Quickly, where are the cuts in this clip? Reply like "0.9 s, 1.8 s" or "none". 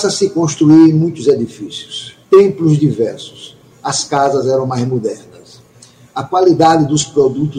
2.2 s